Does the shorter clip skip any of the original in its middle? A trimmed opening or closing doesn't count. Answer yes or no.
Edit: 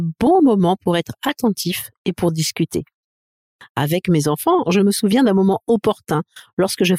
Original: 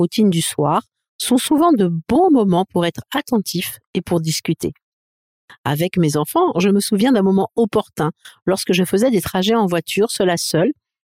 no